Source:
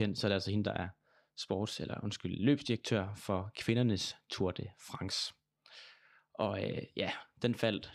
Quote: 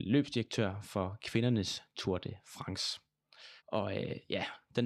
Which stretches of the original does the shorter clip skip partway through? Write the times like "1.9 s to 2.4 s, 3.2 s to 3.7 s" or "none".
5.9 s to 6.2 s